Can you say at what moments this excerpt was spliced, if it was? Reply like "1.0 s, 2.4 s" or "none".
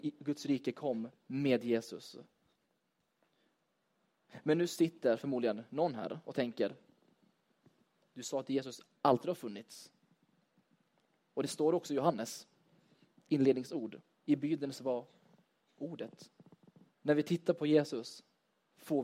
1.2 s, 16.9 s

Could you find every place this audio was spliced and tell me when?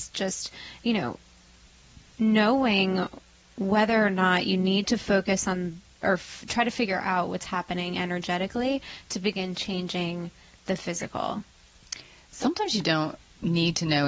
2.1 s

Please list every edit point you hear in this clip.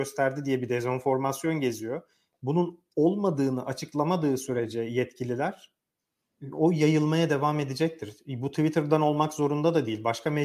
none

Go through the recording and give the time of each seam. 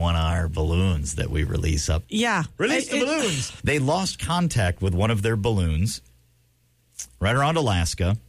2.0 s, 3.6 s

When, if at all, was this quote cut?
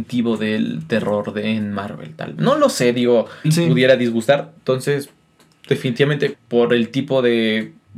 3.4 s, 4.6 s, 6.3 s

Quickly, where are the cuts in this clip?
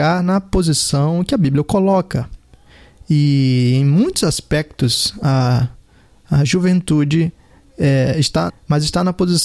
8.5 s

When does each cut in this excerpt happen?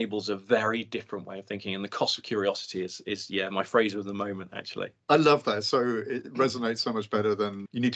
none

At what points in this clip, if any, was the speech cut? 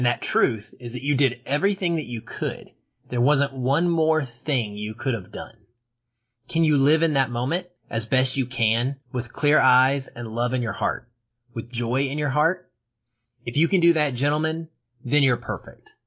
7.8 s, 9.0 s

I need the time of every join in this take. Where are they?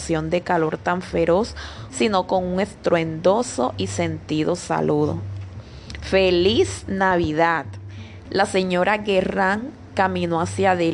1.9 s, 8.3 s

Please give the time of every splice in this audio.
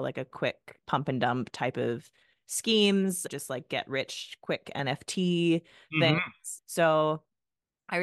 none

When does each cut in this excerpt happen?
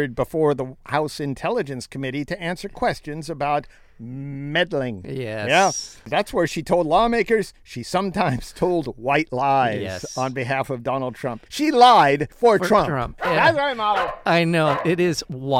11.5 s, 13.2 s

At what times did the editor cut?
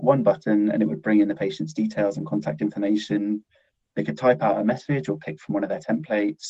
none

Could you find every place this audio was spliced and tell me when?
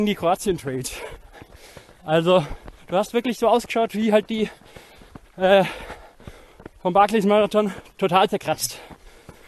none

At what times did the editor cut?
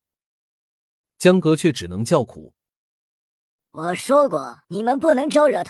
4.6 s

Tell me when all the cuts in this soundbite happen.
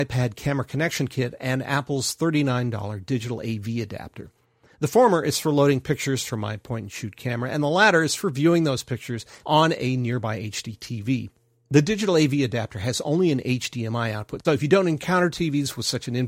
9.4 s, 14.4 s

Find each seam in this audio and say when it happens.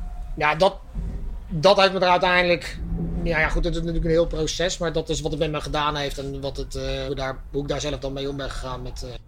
7.1 s

